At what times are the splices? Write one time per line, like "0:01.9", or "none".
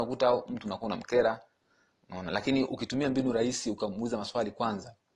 none